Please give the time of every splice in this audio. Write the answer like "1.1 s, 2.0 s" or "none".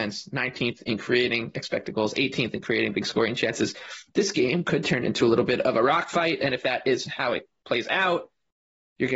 none